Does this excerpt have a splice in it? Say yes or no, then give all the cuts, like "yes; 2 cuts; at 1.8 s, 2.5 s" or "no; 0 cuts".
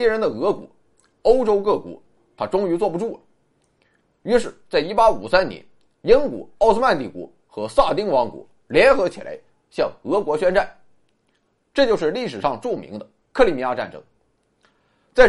yes; 1 cut; at 6.6 s